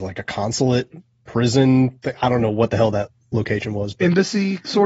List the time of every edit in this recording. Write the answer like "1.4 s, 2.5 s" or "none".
none